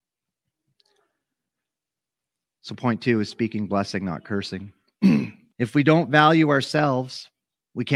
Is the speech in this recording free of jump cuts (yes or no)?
no